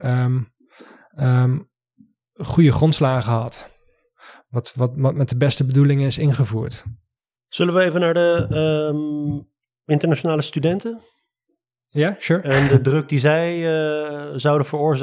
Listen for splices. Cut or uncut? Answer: uncut